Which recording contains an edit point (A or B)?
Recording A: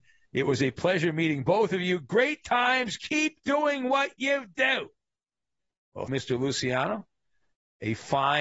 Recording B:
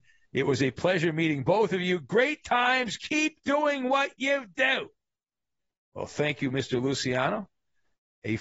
A